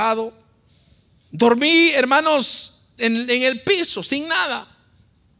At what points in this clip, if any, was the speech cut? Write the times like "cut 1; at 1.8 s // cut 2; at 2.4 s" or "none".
cut 1; at 3.0 s